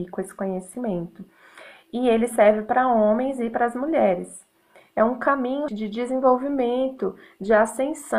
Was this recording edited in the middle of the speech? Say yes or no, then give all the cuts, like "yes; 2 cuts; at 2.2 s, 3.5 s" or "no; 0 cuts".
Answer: yes; 1 cut; at 5.7 s